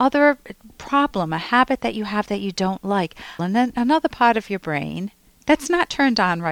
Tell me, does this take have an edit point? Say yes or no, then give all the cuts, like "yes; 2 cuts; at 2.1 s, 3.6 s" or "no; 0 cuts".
yes; 1 cut; at 3.4 s